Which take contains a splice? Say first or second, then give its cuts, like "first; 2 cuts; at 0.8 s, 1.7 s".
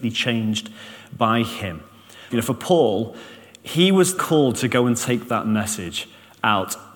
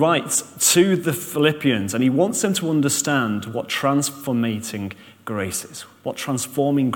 first; 2 cuts; at 2.3 s, 4.2 s